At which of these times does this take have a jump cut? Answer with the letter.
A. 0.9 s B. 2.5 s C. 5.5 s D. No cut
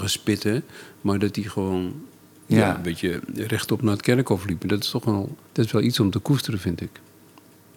C